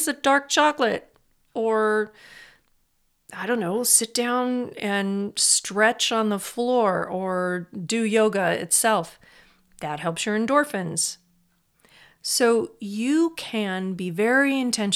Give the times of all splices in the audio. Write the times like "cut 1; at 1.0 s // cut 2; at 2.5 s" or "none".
none